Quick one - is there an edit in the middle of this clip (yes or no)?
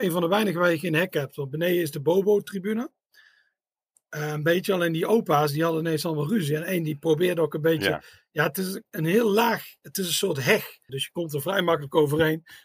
yes